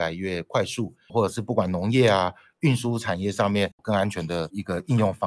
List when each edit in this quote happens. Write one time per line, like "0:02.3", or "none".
0:01.1
0:03.8